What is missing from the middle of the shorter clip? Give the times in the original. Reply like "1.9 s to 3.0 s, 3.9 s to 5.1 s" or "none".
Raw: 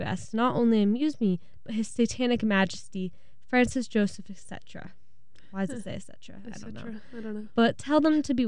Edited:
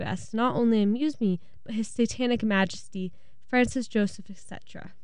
none